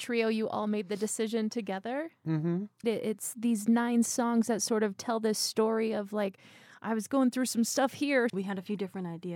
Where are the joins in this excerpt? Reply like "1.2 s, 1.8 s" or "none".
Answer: 2.8 s, 8.3 s